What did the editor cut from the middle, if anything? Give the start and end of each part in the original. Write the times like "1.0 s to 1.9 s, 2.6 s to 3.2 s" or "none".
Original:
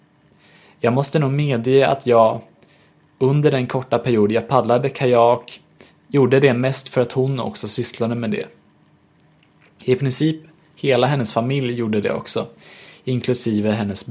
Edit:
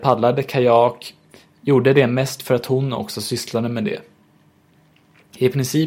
none